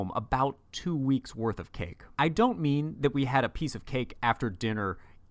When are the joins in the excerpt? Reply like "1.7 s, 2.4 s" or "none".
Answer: 2.1 s